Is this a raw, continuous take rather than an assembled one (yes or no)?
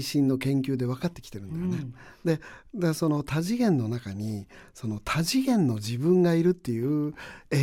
yes